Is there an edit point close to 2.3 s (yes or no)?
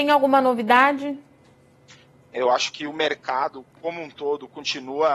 yes